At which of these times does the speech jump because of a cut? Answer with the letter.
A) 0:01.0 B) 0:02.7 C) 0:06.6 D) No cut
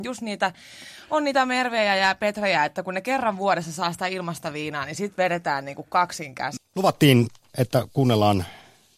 C